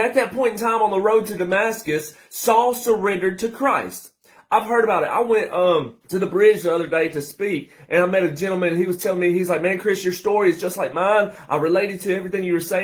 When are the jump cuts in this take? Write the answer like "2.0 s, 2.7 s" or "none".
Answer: 6.0 s

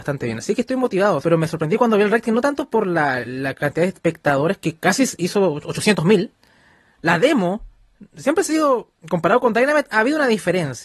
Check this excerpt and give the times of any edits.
1.2 s

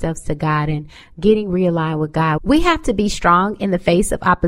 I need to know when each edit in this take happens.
2.4 s

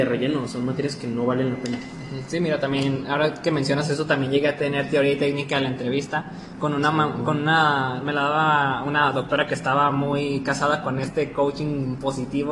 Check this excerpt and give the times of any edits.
none

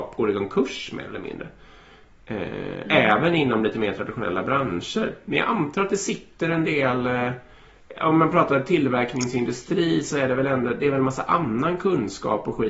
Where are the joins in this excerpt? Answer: none

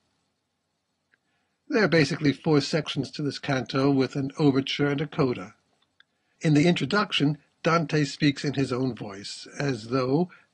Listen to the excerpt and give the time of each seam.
none

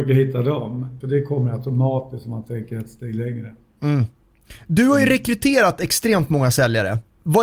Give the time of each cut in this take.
1.0 s

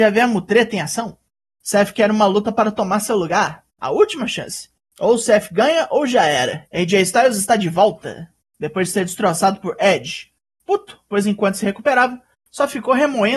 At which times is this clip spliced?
3.8 s, 6.7 s

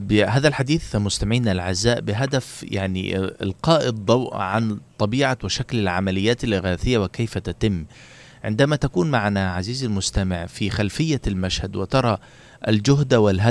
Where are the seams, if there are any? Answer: none

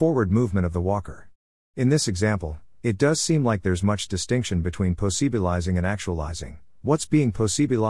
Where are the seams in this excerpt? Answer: none

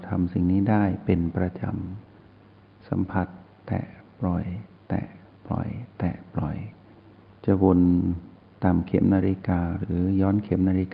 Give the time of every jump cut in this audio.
2.1 s

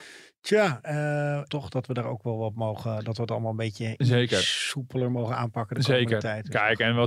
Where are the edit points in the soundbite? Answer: 1.5 s

